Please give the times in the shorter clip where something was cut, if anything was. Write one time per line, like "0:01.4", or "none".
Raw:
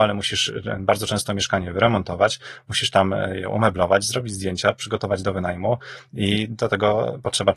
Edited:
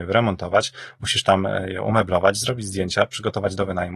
none